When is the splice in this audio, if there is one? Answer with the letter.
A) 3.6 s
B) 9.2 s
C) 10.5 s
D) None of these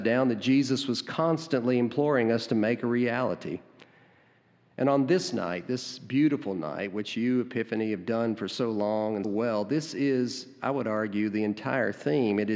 B